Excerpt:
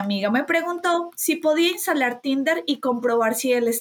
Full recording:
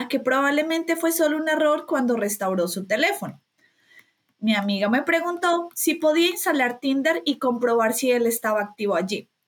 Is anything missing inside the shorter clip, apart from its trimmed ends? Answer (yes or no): no